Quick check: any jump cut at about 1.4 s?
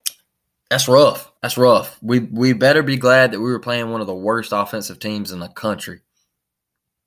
yes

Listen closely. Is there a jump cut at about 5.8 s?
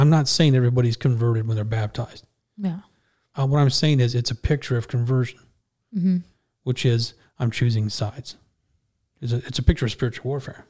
no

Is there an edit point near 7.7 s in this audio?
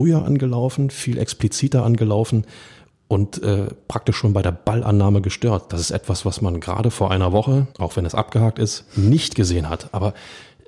yes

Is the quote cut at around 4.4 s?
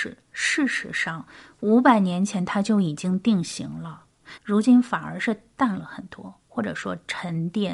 yes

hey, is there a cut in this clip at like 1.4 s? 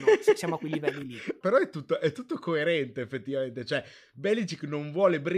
yes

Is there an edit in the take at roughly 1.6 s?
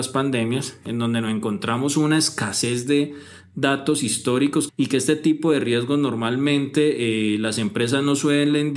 no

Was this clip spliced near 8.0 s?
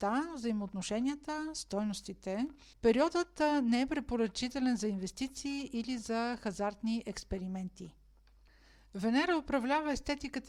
no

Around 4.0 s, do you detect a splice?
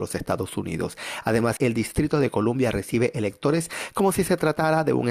no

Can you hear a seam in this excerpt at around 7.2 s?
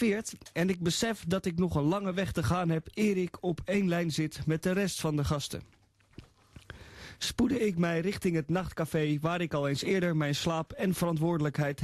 yes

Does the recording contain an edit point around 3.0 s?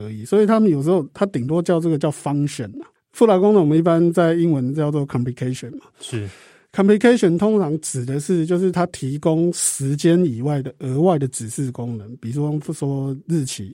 yes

